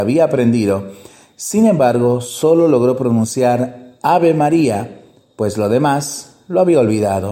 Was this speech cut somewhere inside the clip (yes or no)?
no